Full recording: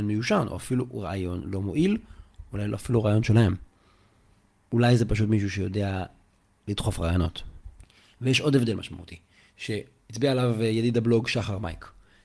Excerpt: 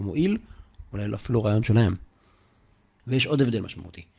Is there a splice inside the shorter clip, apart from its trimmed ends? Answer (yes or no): yes